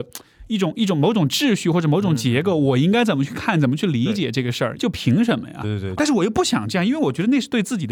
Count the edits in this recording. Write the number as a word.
two